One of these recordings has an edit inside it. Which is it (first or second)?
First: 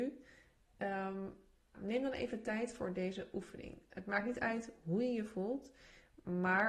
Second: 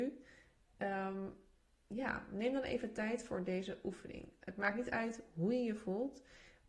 first